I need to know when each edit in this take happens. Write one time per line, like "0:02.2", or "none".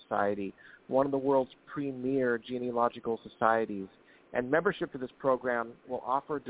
none